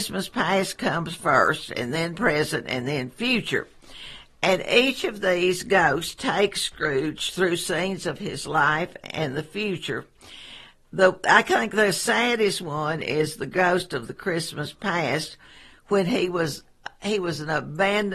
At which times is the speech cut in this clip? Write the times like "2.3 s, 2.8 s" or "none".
none

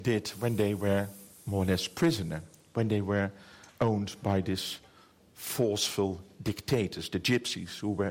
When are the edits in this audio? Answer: none

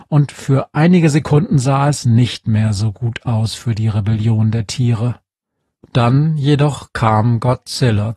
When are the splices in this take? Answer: none

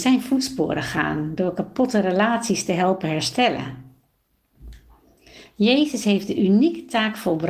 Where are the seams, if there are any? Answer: 5.5 s

